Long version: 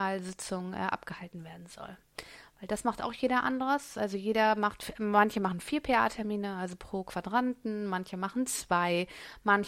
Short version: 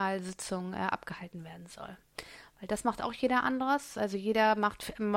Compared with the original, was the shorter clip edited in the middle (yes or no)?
no